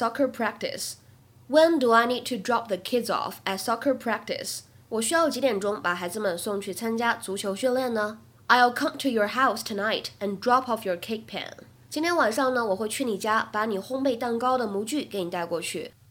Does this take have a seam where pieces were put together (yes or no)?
yes